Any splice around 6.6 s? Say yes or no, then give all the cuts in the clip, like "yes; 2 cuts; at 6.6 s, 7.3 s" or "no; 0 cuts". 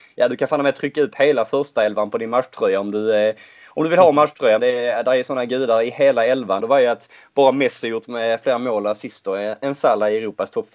yes; 2 cuts; at 4.6 s, 6.6 s